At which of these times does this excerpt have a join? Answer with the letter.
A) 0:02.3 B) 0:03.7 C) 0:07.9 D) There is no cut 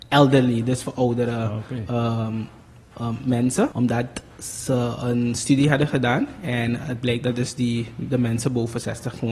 B